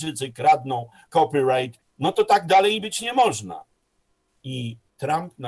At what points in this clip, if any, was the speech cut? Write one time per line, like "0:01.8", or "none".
0:01.8